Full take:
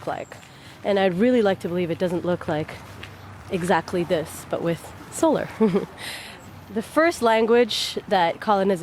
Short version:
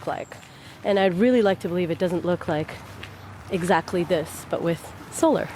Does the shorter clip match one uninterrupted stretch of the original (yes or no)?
yes